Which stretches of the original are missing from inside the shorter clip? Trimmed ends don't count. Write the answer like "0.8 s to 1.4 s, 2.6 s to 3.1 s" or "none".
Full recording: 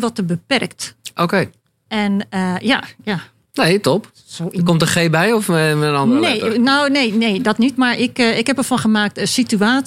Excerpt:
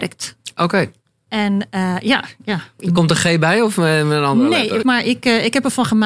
3.4 s to 4.5 s, 6.5 s to 7.8 s